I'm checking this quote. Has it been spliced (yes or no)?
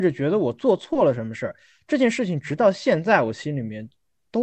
no